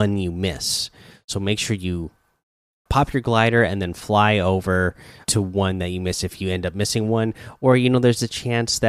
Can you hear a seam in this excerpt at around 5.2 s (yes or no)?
yes